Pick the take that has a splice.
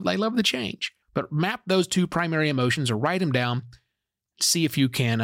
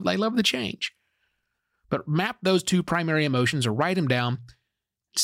first; 1 cut; at 1.0 s

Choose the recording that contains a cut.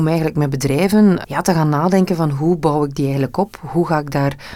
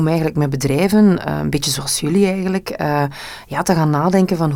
first; 1 cut; at 1.2 s

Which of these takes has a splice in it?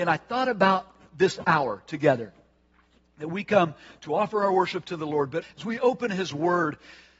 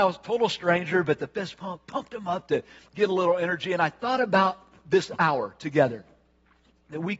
first; 1 cut; at 5.4 s

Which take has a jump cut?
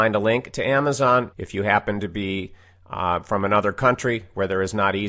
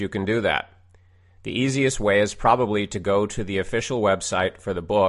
first; 1 cut; at 1.3 s

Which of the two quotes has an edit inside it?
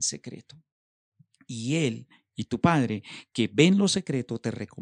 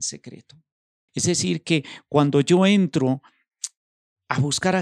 second; 1 cut; at 1.1 s

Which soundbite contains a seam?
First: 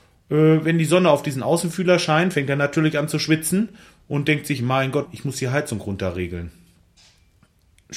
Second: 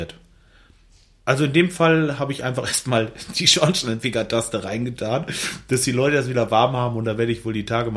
first; 1 cut; at 5.1 s

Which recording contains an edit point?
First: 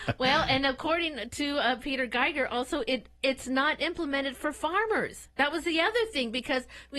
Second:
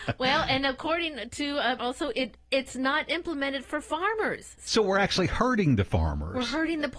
second; 2 cuts; at 1.8 s, 4.6 s

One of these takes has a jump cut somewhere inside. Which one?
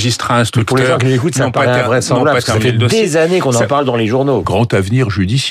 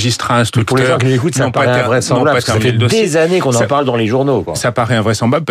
first; 1 cut; at 4.4 s

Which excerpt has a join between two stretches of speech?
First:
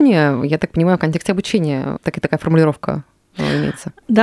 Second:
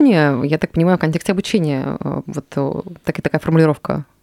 first; 1 cut; at 2.0 s

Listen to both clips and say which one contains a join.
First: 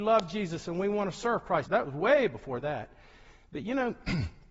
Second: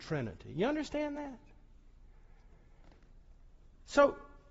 first; 1 cut; at 1.7 s

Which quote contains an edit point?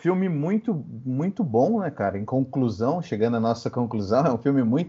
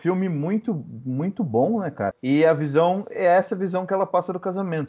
second; 1 cut; at 2.1 s

